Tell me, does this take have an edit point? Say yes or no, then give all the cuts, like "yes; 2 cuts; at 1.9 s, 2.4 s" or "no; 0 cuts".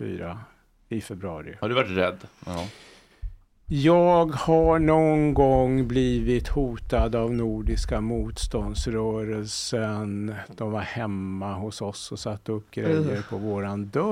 no; 0 cuts